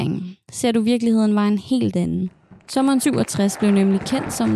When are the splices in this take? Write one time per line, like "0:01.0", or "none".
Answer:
none